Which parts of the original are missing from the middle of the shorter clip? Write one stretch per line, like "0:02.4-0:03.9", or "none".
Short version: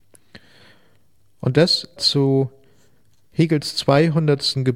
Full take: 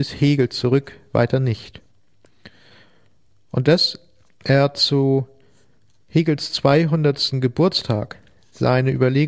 0:04.1-0:04.7